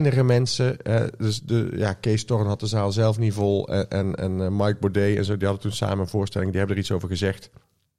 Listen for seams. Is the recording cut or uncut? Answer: uncut